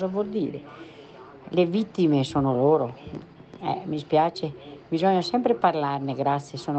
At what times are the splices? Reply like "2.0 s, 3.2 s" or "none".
none